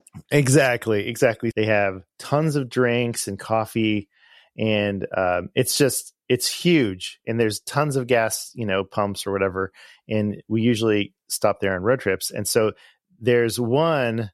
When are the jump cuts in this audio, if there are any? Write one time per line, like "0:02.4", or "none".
0:01.5